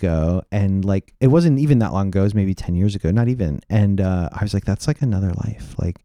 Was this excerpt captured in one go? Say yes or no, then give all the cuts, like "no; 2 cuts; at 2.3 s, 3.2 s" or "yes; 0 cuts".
yes; 0 cuts